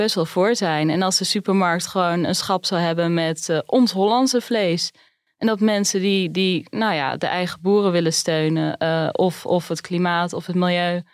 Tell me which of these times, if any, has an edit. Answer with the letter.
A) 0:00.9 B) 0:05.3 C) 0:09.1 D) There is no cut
D